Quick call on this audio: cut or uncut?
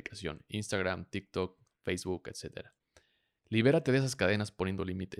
uncut